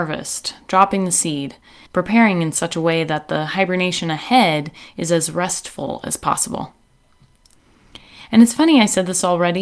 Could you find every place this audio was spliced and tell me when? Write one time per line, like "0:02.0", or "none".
0:01.9

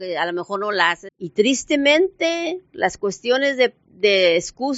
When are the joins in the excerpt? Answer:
0:01.1

